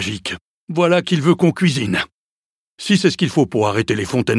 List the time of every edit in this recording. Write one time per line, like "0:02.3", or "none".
none